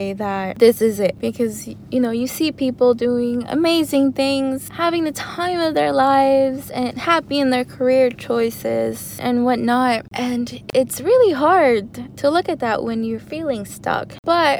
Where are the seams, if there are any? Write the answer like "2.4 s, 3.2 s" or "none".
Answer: none